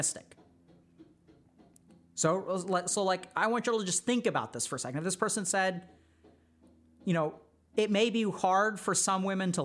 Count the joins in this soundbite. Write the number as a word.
zero